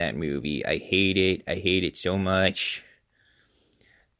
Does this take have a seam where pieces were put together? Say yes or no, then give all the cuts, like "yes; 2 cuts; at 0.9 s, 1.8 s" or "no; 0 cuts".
no; 0 cuts